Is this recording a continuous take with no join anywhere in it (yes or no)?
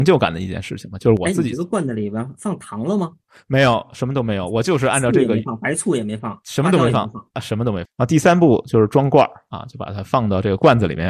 no